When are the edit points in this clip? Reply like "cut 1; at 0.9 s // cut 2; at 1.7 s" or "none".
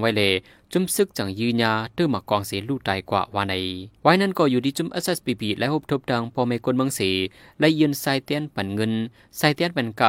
cut 1; at 4.0 s